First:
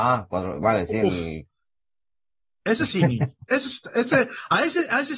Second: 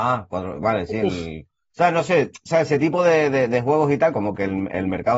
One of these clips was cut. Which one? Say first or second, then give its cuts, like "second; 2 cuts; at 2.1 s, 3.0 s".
second; 2 cuts; at 1.7 s, 4.1 s